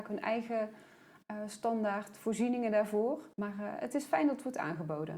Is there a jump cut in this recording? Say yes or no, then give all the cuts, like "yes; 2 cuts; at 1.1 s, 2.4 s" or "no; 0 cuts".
yes; 1 cut; at 3.3 s